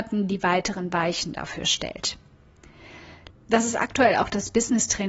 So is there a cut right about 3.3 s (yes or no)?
yes